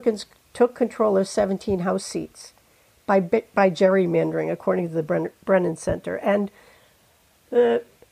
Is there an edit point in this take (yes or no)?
no